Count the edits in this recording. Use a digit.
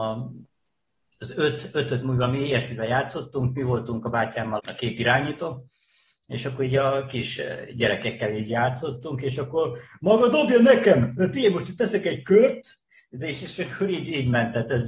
1